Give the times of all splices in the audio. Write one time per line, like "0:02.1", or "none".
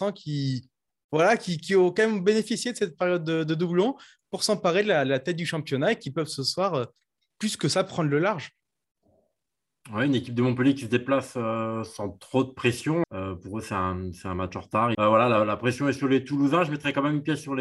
0:13.0
0:14.9